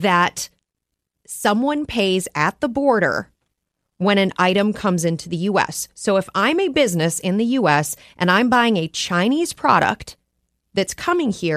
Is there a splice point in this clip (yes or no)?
no